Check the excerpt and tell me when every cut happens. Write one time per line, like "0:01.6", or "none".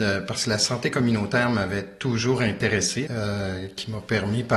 0:03.0